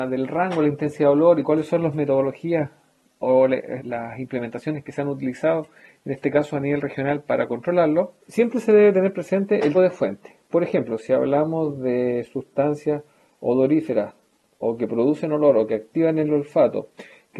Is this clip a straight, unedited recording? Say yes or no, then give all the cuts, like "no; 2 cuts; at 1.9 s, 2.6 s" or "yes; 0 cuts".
no; 3 cuts; at 3.8 s, 8.2 s, 9.7 s